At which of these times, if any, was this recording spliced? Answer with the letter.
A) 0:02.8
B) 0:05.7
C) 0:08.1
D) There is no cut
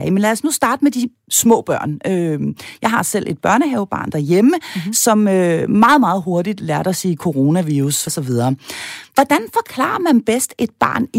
C